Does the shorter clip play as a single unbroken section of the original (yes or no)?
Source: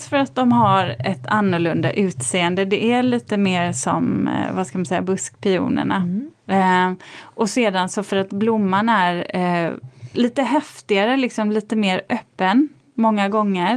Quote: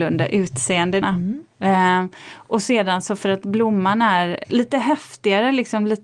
no